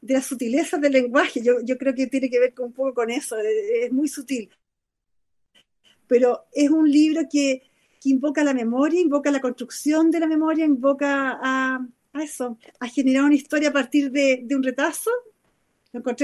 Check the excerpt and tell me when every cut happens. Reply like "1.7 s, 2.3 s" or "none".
12.6 s